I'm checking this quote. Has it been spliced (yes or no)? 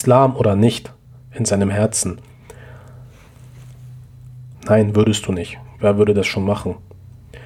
yes